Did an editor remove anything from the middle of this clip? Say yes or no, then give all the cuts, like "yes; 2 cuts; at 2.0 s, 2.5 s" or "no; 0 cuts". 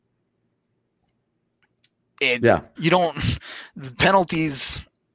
yes; 1 cut; at 2.7 s